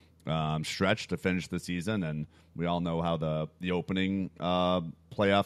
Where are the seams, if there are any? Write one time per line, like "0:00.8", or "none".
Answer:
none